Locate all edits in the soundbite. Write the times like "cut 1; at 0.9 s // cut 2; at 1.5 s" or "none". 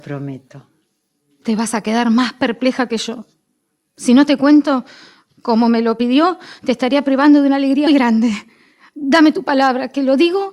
cut 1; at 7.9 s